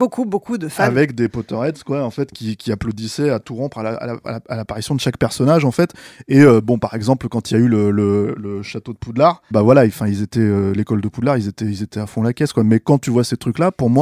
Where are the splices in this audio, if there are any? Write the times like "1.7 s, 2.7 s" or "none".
8.4 s, 9.5 s